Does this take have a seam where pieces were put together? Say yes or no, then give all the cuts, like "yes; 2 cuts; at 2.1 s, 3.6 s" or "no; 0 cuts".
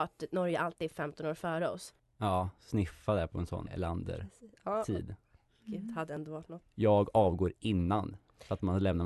yes; 3 cuts; at 2.0 s, 3.7 s, 6.6 s